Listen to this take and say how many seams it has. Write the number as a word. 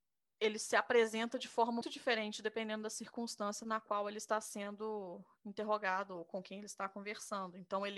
one